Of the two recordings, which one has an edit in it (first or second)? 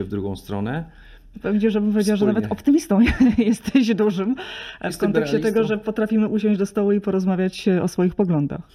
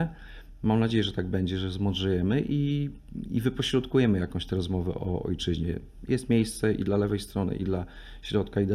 first